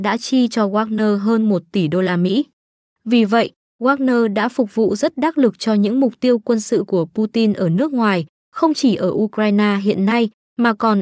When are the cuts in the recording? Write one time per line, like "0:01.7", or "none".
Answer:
none